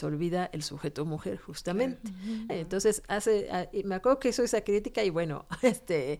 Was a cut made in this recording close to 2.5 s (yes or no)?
yes